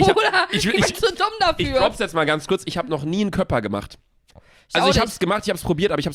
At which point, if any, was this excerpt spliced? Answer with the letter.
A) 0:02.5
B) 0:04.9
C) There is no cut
C